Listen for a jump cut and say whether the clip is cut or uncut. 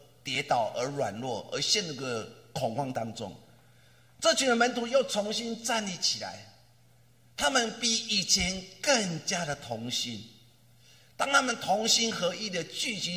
uncut